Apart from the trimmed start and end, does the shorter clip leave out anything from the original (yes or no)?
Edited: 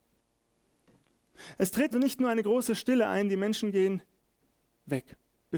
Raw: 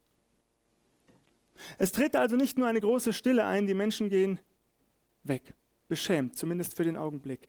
yes